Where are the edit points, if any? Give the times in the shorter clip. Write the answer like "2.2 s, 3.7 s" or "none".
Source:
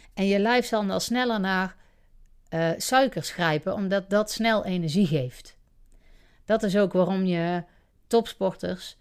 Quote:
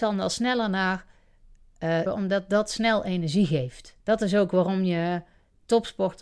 2.1 s, 4.0 s